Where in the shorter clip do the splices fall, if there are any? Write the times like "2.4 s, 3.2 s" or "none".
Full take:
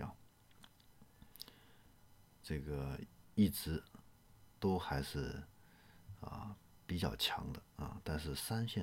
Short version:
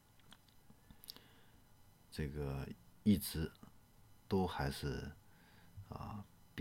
none